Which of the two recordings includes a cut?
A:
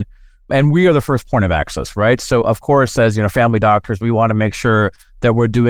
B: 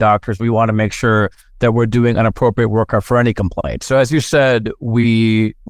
B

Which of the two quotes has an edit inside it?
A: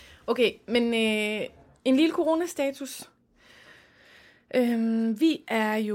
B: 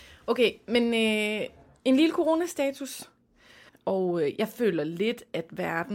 B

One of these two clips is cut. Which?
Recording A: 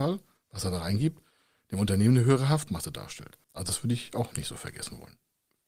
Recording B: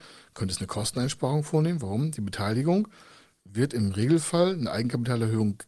A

